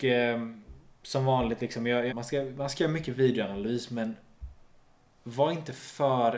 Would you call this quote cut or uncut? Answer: cut